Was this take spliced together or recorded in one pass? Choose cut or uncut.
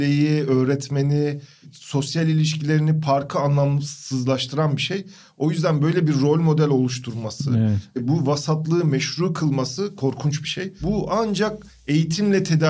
uncut